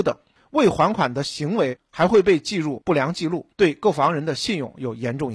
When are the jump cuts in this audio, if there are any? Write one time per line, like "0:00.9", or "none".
0:03.5